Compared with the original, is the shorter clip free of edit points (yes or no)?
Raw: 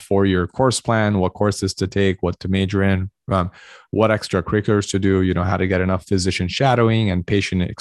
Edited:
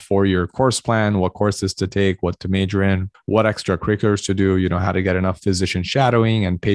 no